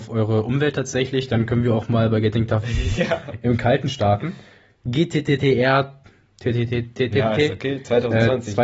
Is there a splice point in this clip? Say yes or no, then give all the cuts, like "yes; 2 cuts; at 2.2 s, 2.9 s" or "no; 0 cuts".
yes; 2 cuts; at 4.8 s, 7.1 s